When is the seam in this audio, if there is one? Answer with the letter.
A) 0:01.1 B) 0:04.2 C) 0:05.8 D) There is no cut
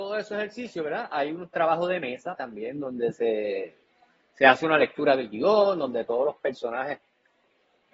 D